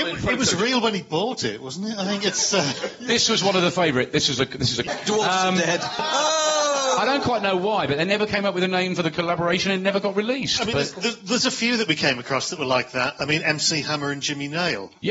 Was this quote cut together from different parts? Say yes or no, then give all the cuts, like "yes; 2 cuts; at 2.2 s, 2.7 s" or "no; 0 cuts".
yes; 2 cuts; at 4.9 s, 6.0 s